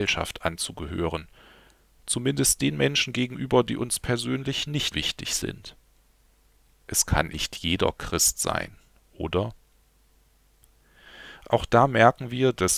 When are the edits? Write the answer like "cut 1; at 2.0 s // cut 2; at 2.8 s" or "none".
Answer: cut 1; at 4.9 s // cut 2; at 7.3 s